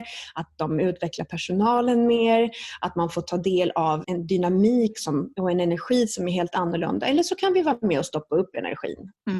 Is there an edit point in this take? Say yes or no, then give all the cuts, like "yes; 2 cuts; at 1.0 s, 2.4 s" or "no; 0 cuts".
yes; 1 cut; at 4.0 s